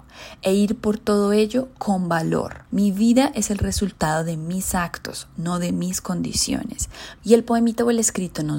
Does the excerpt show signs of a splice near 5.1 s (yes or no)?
no